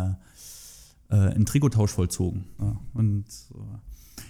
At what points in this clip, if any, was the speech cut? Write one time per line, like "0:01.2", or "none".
0:02.6